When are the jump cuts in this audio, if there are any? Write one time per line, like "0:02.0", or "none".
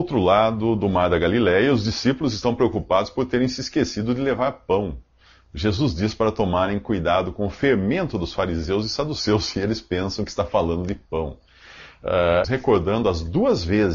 0:12.4